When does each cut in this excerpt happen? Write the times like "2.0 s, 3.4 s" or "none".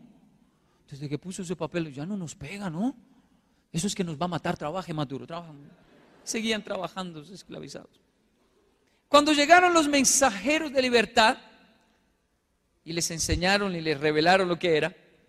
none